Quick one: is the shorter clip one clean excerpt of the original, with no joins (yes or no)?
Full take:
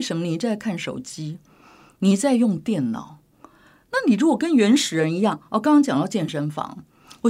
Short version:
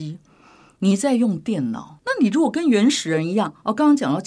no